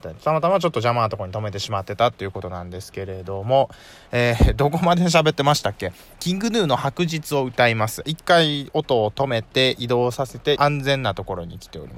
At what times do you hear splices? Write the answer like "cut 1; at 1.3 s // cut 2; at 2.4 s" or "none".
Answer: cut 1; at 8.0 s // cut 2; at 10.6 s